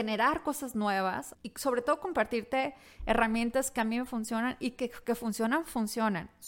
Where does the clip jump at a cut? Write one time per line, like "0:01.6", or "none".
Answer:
0:01.3